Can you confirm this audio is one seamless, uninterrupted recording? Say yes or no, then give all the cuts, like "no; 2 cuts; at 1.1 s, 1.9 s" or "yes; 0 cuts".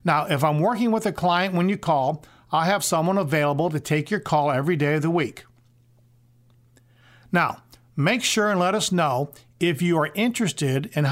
yes; 0 cuts